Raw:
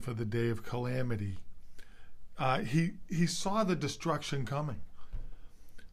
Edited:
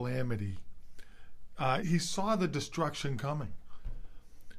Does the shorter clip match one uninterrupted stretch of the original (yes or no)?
no